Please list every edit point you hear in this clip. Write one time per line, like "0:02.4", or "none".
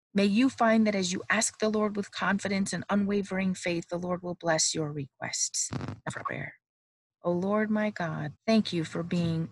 0:08.4